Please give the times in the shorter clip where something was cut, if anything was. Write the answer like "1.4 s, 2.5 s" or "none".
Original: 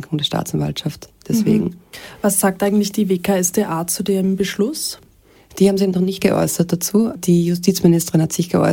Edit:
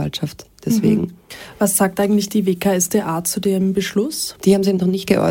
4.4 s